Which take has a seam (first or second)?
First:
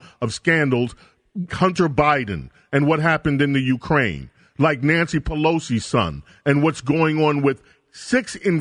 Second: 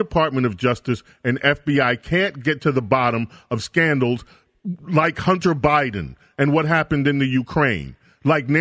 first